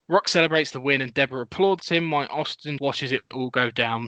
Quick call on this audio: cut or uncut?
cut